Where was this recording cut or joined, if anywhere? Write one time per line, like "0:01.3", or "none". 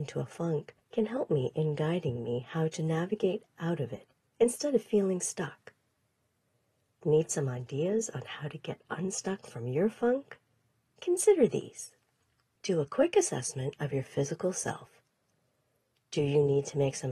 none